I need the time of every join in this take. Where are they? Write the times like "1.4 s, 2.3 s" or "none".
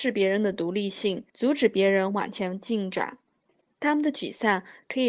1.3 s, 3.6 s